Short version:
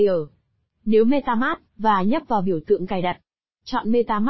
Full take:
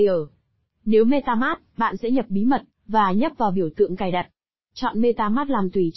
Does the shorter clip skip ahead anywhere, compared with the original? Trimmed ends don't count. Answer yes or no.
yes